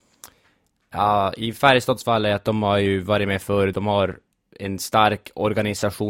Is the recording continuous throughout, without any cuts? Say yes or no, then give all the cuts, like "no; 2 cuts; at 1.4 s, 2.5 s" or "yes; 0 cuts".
yes; 0 cuts